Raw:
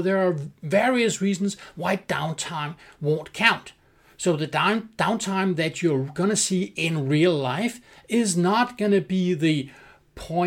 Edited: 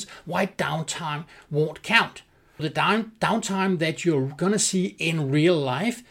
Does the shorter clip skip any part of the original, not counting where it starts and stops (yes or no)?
yes